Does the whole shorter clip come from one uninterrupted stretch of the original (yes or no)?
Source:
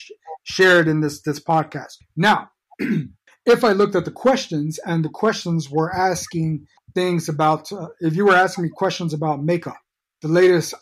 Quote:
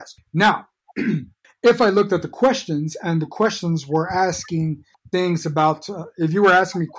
yes